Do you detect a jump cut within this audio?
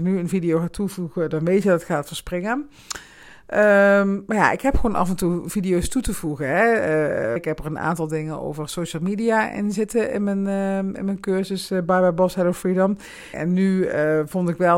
yes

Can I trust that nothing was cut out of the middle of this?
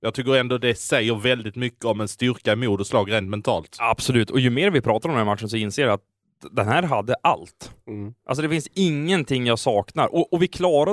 yes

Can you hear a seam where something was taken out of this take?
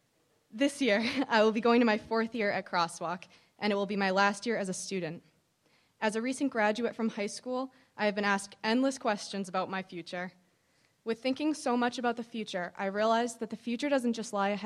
no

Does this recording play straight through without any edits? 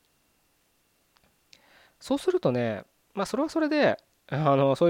no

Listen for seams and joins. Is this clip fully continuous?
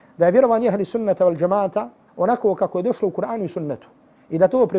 no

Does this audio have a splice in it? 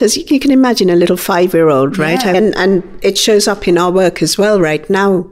yes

